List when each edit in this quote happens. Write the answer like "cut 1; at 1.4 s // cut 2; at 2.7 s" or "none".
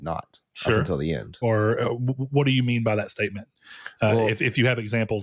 cut 1; at 1.4 s